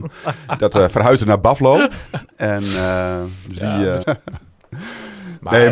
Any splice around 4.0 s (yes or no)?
yes